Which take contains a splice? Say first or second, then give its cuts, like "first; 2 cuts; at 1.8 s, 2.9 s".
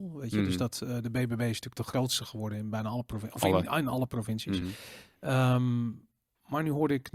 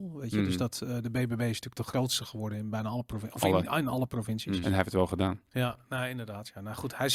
second; 1 cut; at 4.6 s